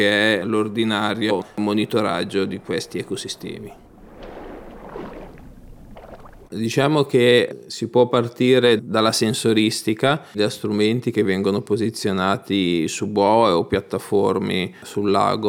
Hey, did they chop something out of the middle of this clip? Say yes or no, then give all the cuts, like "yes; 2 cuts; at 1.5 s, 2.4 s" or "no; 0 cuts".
yes; 2 cuts; at 6.5 s, 10.3 s